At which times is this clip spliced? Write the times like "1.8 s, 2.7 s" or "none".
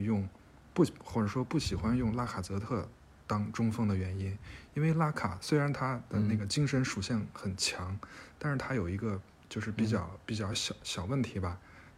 none

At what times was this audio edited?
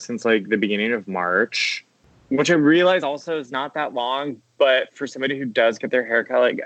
none

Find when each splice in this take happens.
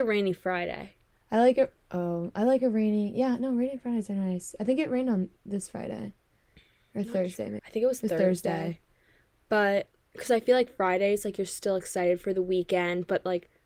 7.6 s

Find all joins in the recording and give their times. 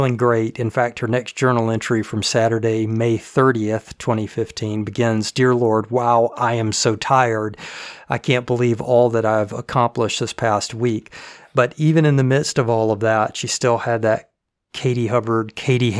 none

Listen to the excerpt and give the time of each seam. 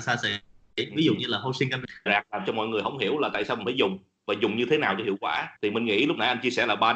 2.1 s, 5.6 s

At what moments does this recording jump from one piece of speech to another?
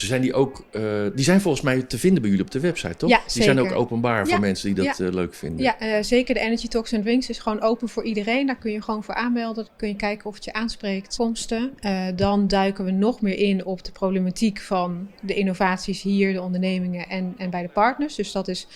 9.7 s, 11.2 s

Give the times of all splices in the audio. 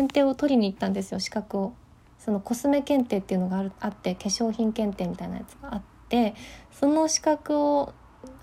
none

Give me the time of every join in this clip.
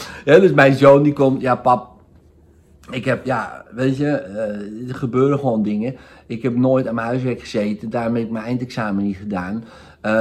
3.2 s

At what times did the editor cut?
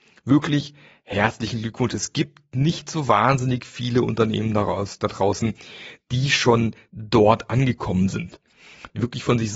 none

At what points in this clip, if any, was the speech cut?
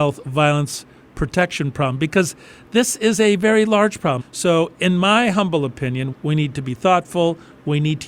4.2 s, 6.1 s

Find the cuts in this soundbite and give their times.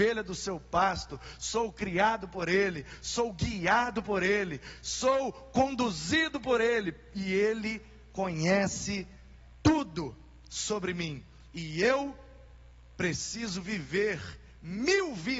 none

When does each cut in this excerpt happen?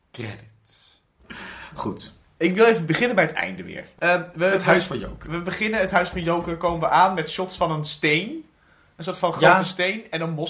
4.0 s

